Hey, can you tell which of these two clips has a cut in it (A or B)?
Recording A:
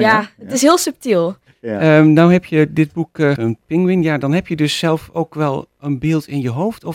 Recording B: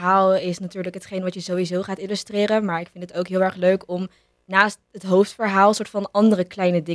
A